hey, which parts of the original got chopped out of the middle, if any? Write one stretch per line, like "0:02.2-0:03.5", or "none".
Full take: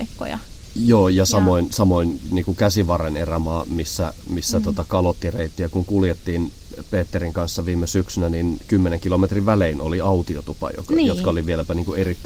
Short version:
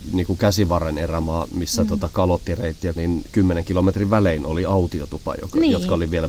0:03.6-0:04.2
0:05.7-0:08.3